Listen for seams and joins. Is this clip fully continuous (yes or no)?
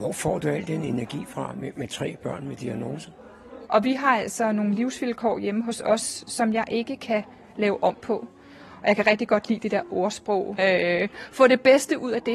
no